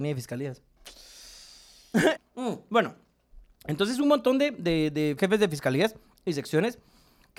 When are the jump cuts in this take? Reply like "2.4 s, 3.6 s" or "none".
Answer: 2.2 s, 5.2 s